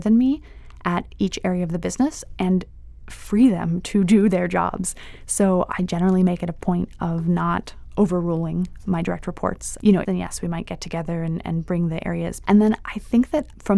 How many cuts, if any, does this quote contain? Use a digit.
2